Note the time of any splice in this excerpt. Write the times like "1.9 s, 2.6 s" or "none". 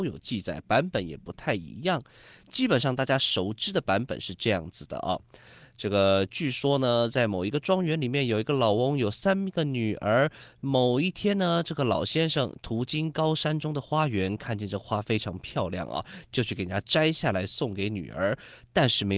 none